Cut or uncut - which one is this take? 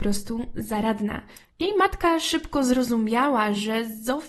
cut